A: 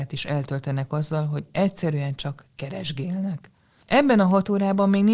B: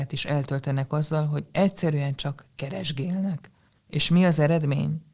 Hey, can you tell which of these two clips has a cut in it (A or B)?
B